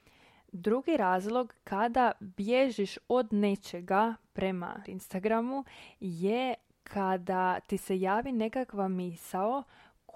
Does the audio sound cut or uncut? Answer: cut